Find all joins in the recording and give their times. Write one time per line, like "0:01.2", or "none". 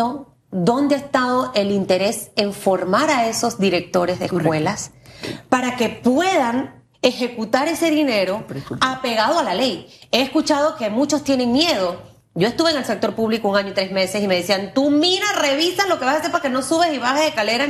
0:06.9